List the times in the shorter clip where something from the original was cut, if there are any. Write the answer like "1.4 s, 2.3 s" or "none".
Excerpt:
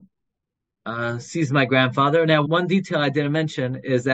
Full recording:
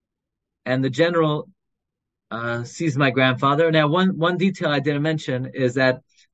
2.4 s